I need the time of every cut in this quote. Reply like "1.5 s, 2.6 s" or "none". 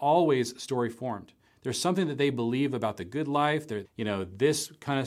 3.8 s

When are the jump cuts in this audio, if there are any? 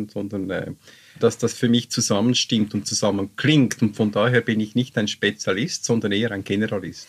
1.2 s

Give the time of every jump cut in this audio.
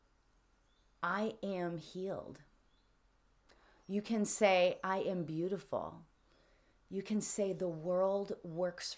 none

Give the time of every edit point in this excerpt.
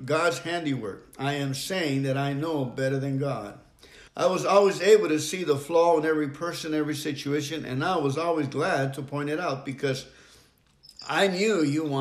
4.1 s

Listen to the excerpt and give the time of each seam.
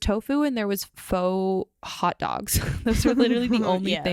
none

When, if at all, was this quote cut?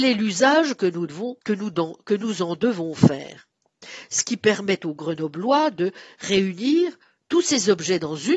1.4 s

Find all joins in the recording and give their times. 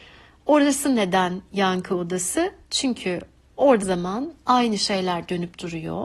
3.8 s

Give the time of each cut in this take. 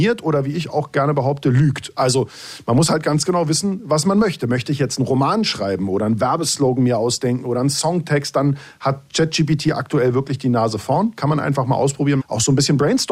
12.2 s

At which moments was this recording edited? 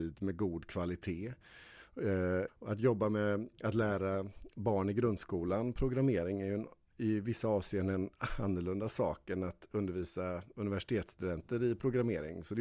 2.5 s

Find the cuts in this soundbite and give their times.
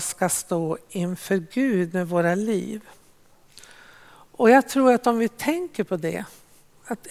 none

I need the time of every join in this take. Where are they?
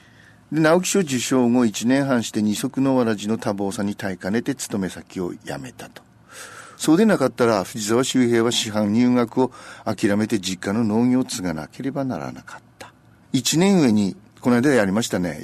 6.7 s, 13.2 s

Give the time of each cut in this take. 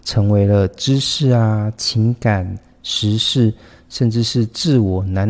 none

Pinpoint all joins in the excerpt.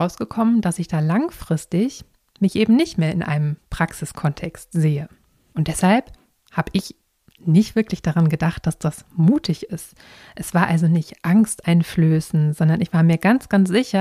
5.5 s

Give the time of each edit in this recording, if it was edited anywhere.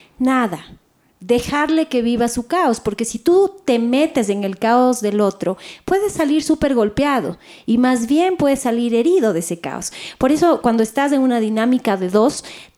none

